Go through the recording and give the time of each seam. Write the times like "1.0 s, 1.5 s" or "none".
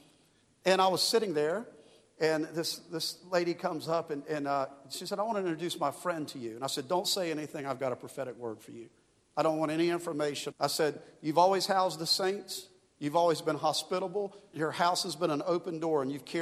10.5 s, 14.5 s